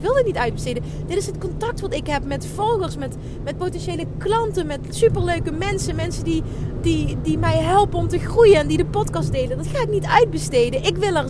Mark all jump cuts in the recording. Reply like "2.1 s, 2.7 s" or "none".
none